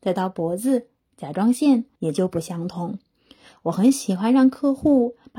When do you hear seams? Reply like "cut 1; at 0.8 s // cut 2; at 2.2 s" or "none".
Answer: cut 1; at 2.0 s // cut 2; at 3.5 s